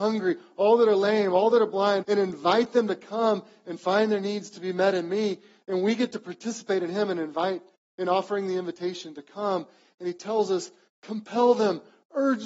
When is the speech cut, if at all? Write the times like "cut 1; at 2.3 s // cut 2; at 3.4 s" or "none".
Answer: cut 1; at 2.0 s

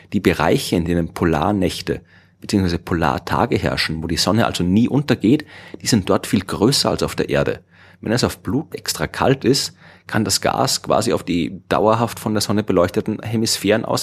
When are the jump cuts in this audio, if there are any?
cut 1; at 8.7 s

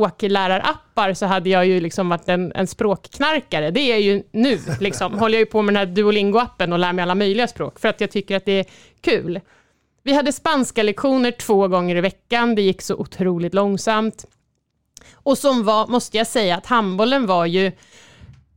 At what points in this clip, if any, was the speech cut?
none

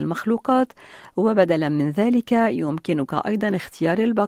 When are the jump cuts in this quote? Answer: none

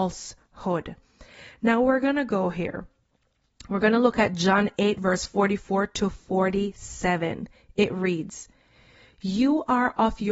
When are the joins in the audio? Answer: none

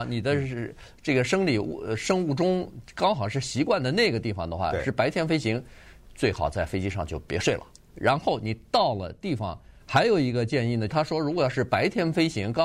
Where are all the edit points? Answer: cut 1; at 9.8 s // cut 2; at 10.9 s

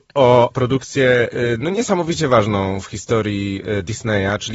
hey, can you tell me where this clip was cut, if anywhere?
none

